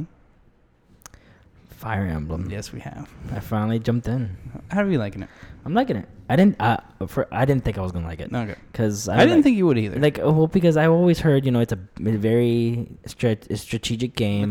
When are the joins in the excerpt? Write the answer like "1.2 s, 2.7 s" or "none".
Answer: none